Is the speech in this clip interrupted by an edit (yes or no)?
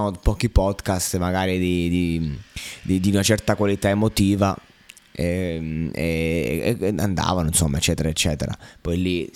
no